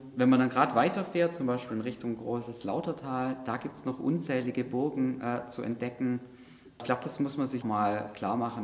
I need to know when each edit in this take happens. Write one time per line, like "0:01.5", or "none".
0:07.6